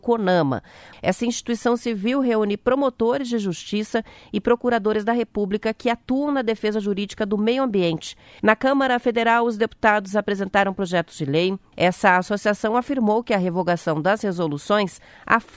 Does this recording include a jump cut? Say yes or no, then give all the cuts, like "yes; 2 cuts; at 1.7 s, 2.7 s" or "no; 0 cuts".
yes; 3 cuts; at 0.9 s, 8.4 s, 11.7 s